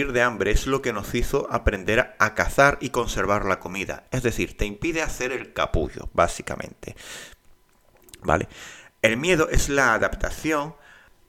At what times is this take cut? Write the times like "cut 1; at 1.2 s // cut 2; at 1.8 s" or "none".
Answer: cut 1; at 4.1 s